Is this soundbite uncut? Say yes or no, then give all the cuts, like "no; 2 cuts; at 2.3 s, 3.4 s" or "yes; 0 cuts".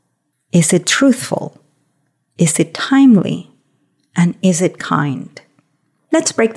yes; 0 cuts